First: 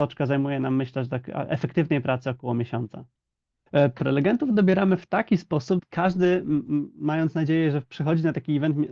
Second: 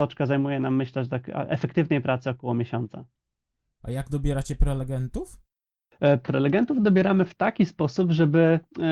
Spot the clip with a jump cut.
first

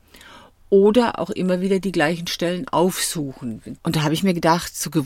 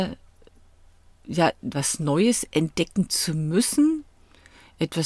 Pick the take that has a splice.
first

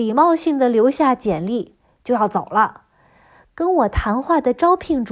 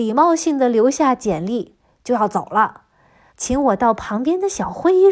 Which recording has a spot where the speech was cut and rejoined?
second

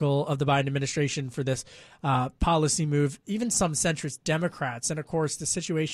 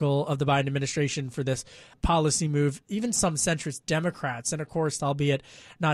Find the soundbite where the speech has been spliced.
second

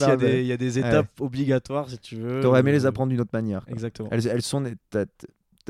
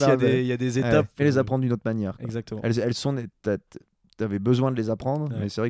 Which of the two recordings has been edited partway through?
second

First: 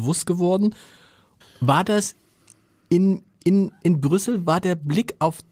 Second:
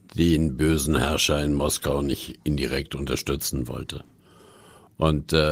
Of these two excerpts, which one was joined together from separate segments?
first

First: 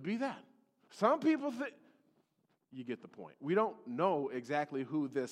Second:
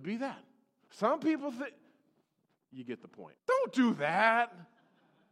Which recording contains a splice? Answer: second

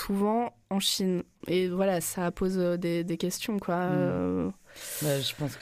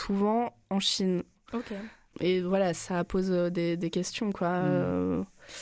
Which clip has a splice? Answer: first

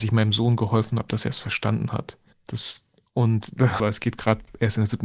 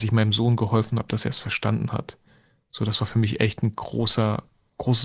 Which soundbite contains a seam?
first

